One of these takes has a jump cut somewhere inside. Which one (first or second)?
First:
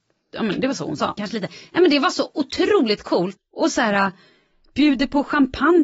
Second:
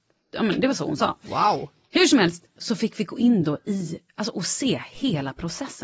first